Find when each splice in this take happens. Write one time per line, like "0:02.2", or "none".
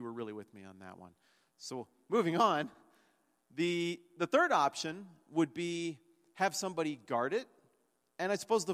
none